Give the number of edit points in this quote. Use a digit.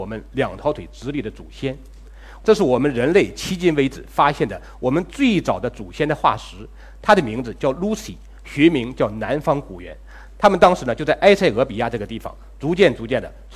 1